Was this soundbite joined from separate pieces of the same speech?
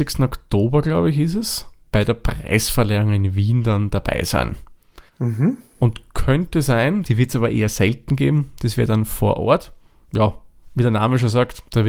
yes; 2 cuts; at 5.1 s, 7.0 s

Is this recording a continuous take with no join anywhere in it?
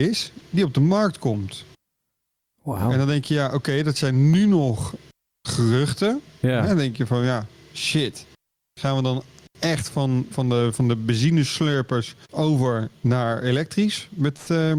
no; 2 cuts; at 10.3 s, 12.2 s

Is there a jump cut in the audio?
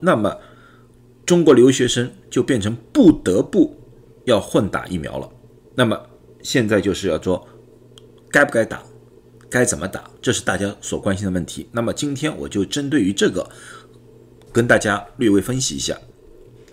yes; 1 cut; at 10.2 s

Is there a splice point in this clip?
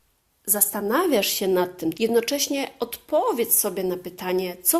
yes; 1 cut; at 1.9 s

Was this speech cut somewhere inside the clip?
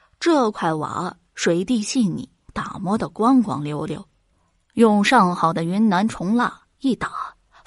yes; 1 cut; at 2.5 s

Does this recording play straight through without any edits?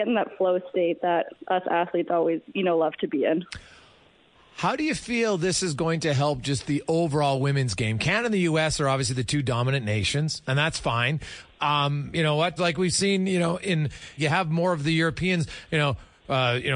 no; 3 cuts; at 12.6 s, 14.2 s, 15.7 s

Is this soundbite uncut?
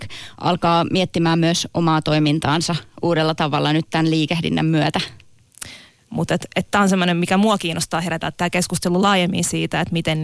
no; 1 cut; at 6.1 s

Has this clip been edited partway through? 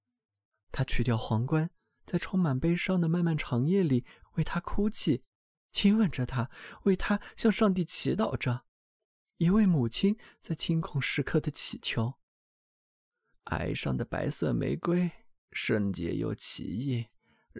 yes; 1 cut; at 4.2 s

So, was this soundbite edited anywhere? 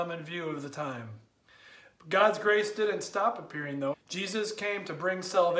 yes; 1 cut; at 3.9 s

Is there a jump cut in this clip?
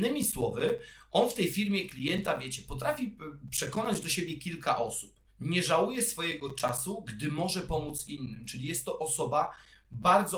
yes; 1 cut; at 5.3 s

